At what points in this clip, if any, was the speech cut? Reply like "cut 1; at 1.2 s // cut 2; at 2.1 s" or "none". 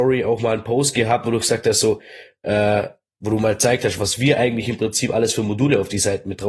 none

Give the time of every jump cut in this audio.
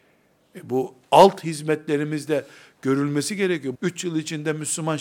cut 1; at 3.7 s

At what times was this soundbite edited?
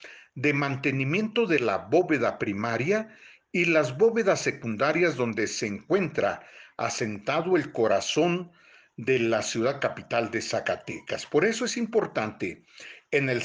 none

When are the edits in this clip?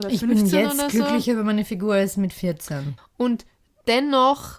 cut 1; at 3.0 s

